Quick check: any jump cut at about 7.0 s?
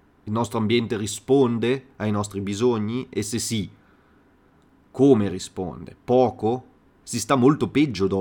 yes; 1 cut; at 7.0 s

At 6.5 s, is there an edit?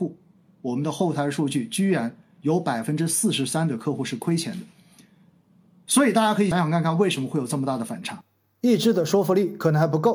yes; 1 cut; at 6.5 s

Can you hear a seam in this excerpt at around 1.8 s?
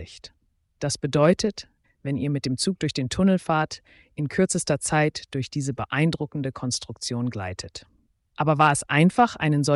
yes; 1 cut; at 1.8 s

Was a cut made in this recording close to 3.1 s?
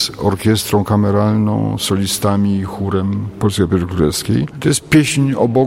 no; 1 cut; at 4.5 s

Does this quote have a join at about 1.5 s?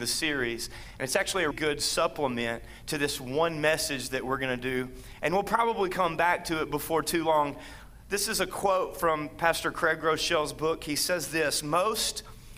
yes; 1 cut; at 1.5 s

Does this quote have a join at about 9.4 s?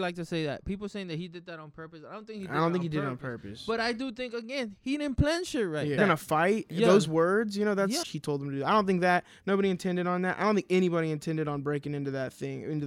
no; 2 cuts; at 6.0 s, 8.0 s

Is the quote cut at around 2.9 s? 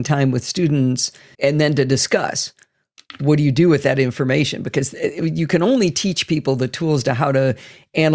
no; 1 cut; at 1.3 s

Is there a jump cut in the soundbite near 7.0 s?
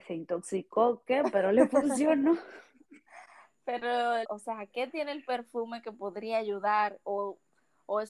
no; 1 cut; at 4.2 s

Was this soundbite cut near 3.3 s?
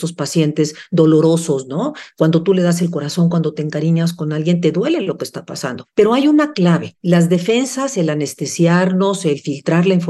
no; 0 cuts

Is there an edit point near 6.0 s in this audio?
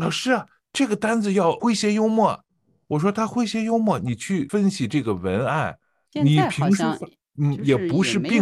yes; 1 cut; at 6.0 s

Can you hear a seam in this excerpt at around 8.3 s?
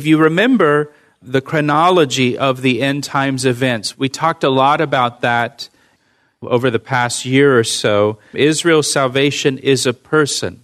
yes; 2 cuts; at 3.9 s, 8.3 s

